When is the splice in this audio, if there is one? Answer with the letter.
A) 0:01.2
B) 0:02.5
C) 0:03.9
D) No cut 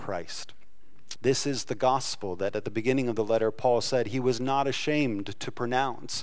A